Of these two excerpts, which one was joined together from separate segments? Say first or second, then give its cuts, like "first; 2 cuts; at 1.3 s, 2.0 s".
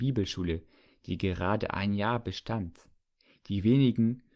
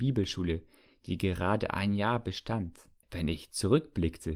second; 1 cut; at 3.0 s